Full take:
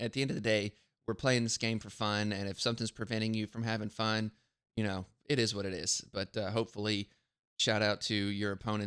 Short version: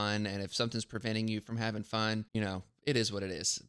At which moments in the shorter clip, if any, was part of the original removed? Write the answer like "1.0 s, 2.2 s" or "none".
2.3 s